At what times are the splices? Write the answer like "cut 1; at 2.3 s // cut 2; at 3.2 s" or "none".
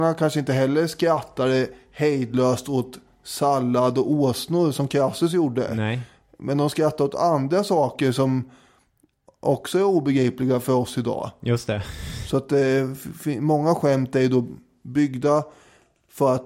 none